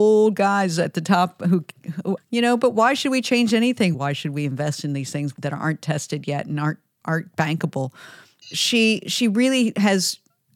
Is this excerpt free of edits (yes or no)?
no